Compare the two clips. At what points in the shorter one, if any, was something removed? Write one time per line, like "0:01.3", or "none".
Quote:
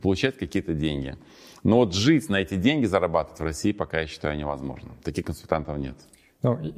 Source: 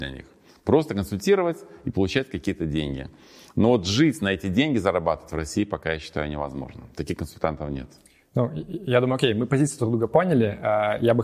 none